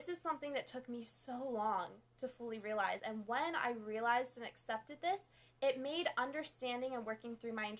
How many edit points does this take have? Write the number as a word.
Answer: zero